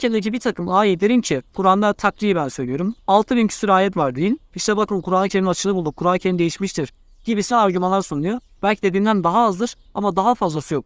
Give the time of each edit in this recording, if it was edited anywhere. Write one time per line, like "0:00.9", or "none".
0:04.5
0:08.6